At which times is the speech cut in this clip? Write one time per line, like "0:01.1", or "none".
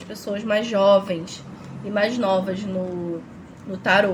none

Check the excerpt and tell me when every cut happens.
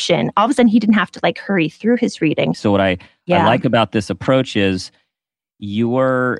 0:02.5

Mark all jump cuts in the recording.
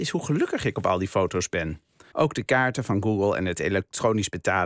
0:02.1

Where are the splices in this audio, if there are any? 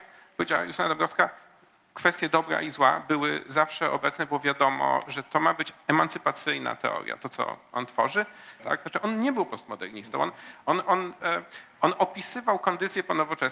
0:08.6

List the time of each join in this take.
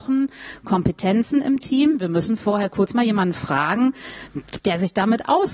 none

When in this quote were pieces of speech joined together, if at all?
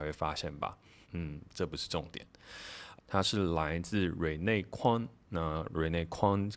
0:01.0
0:03.0

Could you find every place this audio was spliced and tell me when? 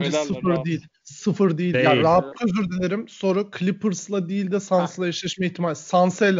0:02.3

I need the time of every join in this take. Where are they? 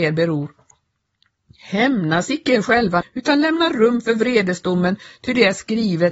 0:03.0

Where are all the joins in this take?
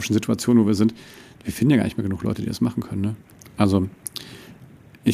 none

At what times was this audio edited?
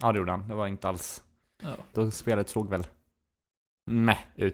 0:01.9

